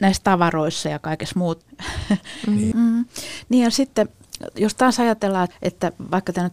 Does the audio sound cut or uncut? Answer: cut